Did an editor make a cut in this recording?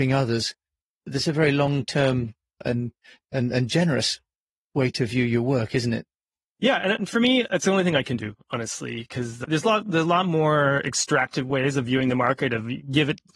no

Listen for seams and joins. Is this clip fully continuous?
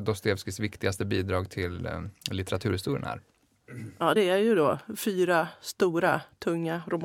yes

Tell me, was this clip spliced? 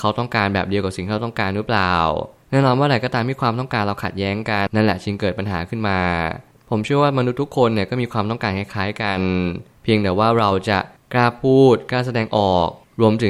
yes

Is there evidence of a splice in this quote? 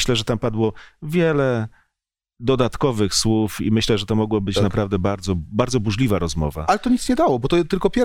no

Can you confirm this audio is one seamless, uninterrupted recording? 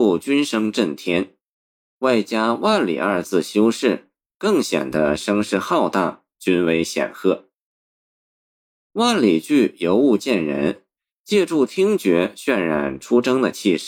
yes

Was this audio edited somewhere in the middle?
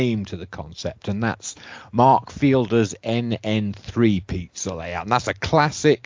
no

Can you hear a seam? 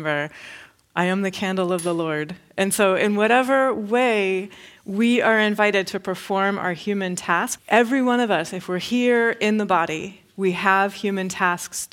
no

